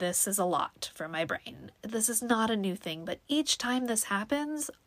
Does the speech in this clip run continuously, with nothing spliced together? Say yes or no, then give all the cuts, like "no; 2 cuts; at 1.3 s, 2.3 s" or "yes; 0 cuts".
no; 1 cut; at 1.8 s